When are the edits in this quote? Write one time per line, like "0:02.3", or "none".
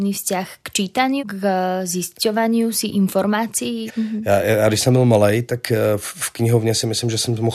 0:01.2
0:03.9